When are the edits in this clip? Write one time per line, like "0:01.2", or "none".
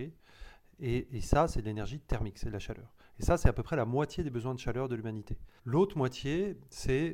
0:05.6

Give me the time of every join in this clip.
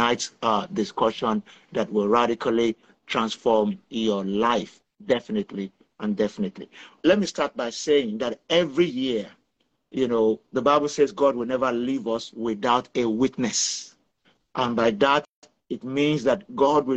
0:07.0

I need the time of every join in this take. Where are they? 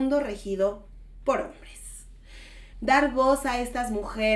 0:02.7

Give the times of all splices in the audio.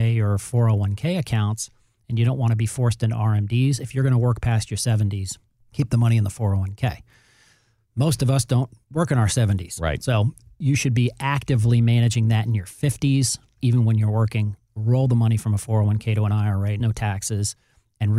0:13.6
0:16.8

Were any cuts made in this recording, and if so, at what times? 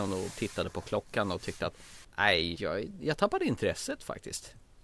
0:02.5

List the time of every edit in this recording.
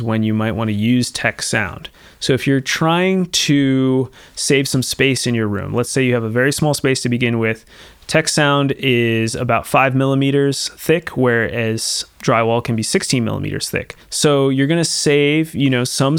0:14.0

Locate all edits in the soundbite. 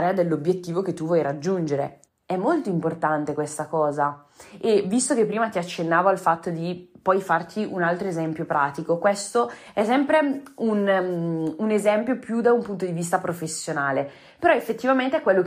0:02.0

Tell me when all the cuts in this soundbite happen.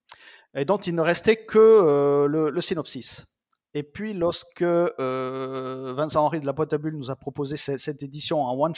none

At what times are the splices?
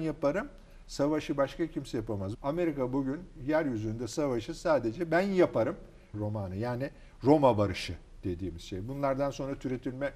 0:02.3
0:06.1

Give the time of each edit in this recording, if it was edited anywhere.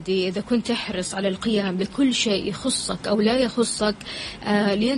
none

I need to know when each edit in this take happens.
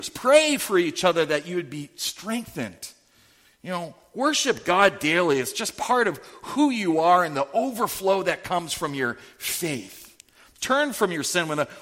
none

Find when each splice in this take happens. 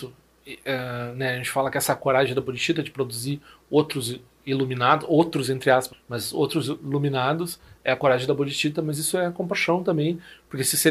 0:05.9

